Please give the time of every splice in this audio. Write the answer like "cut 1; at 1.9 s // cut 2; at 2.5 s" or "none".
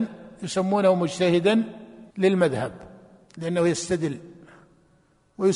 cut 1; at 2.1 s